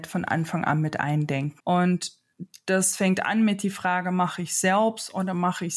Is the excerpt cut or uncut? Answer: cut